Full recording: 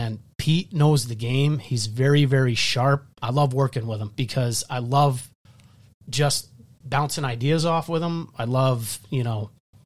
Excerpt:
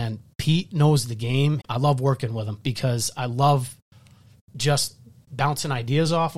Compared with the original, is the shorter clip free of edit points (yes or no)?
no